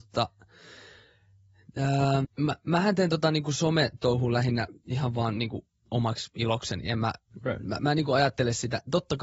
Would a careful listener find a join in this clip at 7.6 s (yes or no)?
no